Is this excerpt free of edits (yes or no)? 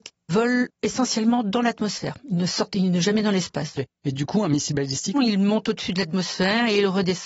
no